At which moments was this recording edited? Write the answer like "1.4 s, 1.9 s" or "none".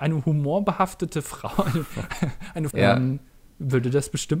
2.7 s